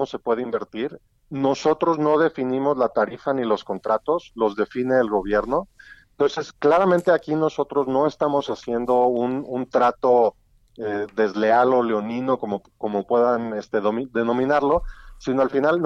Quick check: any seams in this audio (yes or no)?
no